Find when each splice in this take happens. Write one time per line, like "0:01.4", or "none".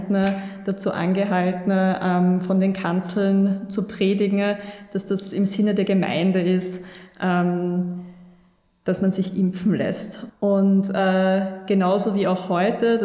none